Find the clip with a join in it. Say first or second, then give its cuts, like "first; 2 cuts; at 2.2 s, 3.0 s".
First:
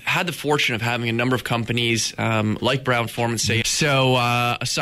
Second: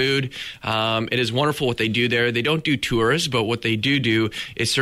first; 1 cut; at 3.6 s